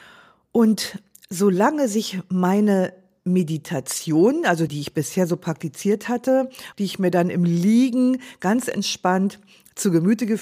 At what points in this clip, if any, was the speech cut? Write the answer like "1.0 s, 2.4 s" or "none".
4.7 s, 6.7 s